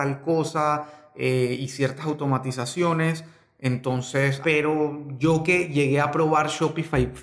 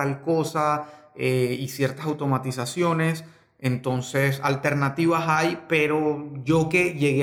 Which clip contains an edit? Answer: first; 1 cut; at 4.4 s

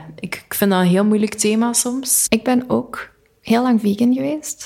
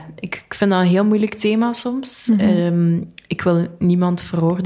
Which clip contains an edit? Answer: first; 1 cut; at 2.3 s

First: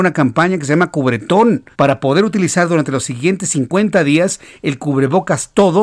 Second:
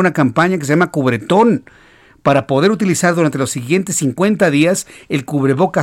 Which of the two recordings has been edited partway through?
first; 1 cut; at 1.7 s

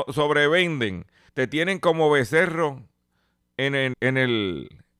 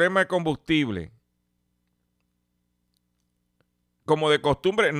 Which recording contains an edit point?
first; 2 cuts; at 1.3 s, 3.9 s

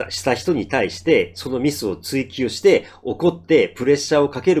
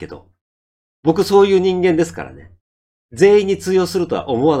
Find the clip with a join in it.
second; 1 cut; at 2.9 s

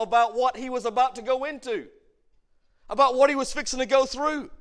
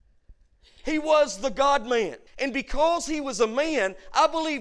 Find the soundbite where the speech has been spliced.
second; 1 cut; at 2.3 s

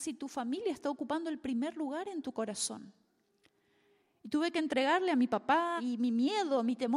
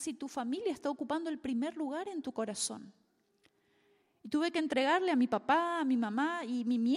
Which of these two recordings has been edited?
first; 1 cut; at 5.8 s

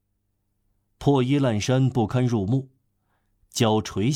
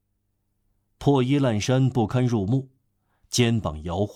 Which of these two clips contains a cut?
second; 1 cut; at 3.2 s

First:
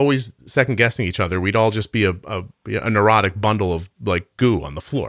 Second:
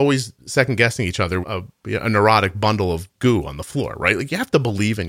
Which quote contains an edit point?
second; 2 cuts; at 1.4 s, 3.1 s

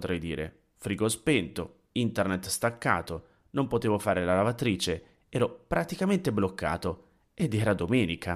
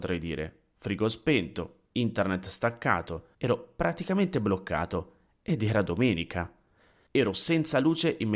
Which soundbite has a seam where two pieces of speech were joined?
second; 2 cuts; at 3.3 s, 7.1 s

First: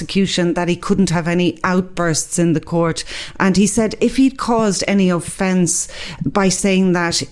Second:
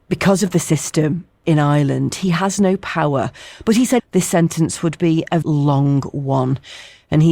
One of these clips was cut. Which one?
second; 2 cuts; at 4.0 s, 5.4 s

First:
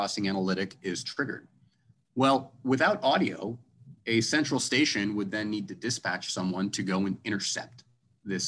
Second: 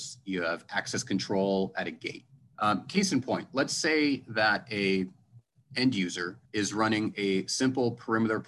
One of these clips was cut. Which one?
second; 2 cuts; at 2.5 s, 6.5 s

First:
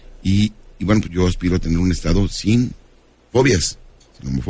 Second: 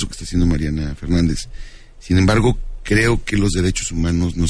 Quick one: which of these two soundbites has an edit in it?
first; 1 cut; at 1.0 s

